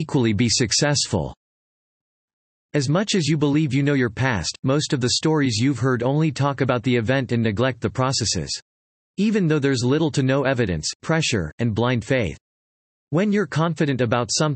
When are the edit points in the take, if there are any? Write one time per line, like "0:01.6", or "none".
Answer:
0:09.1
0:11.0